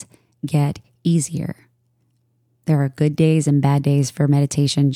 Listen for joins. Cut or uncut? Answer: uncut